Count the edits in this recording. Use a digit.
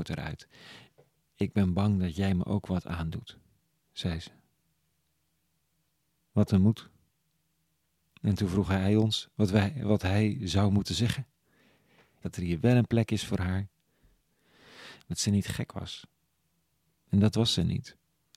2